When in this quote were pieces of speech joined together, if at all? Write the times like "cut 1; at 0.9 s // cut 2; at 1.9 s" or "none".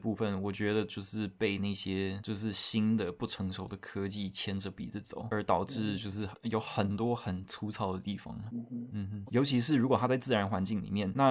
cut 1; at 9.3 s